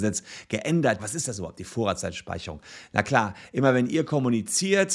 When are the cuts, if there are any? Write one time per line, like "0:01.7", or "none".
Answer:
0:01.0